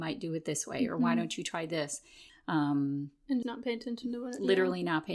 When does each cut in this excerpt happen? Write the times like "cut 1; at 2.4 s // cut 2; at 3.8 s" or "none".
cut 1; at 2.3 s // cut 2; at 3.4 s